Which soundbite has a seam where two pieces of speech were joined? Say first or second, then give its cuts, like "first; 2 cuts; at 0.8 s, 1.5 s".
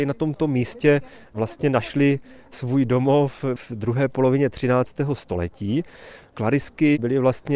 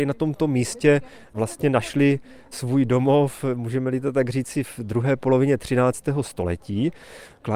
first; 1 cut; at 3.6 s